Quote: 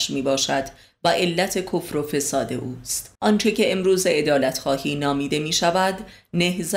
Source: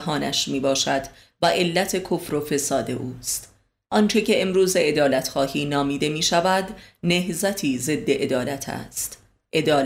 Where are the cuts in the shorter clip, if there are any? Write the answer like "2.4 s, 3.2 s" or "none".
3.1 s